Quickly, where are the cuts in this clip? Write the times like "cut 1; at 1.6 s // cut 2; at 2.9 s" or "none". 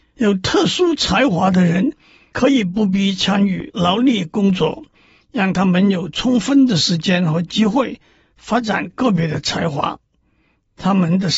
none